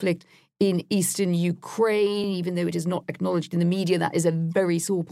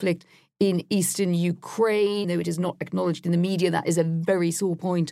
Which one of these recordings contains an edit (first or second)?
second